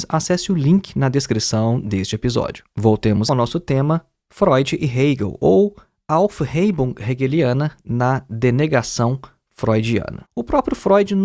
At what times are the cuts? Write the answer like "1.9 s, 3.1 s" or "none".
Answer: 3.3 s, 10.3 s

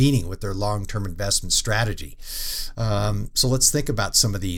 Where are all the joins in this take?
2.8 s

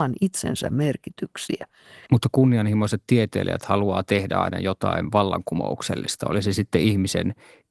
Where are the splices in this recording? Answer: 2.1 s

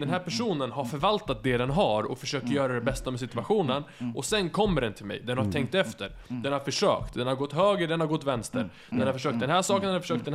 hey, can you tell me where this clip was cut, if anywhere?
none

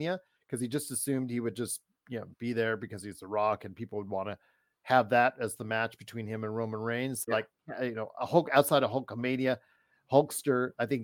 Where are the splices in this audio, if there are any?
7.3 s

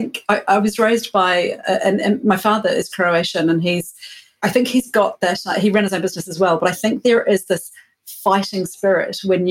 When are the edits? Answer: none

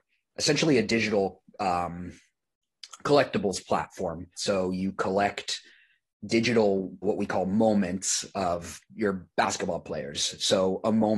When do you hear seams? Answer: 4.3 s, 7.0 s

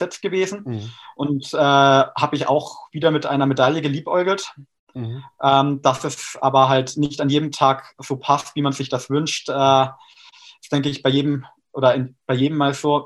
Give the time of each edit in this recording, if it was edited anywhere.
none

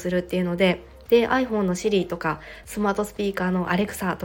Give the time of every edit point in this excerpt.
none

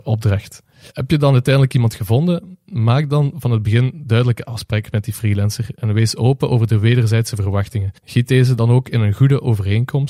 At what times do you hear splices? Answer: 8.0 s

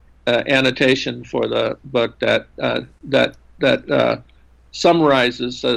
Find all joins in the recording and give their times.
none

